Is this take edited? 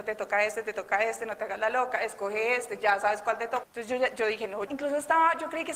yes; 2 cuts; at 3.6 s, 4.7 s

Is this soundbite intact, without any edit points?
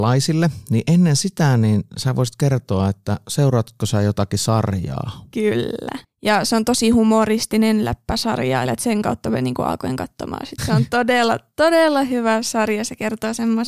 no; 3 cuts; at 6.0 s, 8.7 s, 10.6 s

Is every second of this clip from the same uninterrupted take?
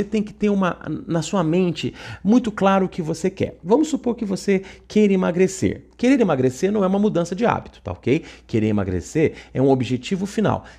yes; 0 cuts

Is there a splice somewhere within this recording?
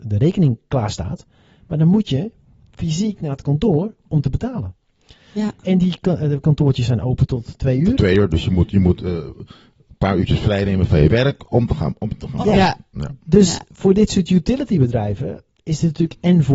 yes; 1 cut; at 12.4 s

